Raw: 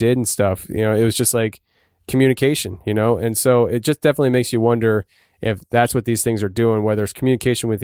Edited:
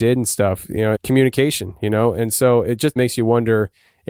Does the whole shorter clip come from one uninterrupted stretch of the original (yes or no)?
no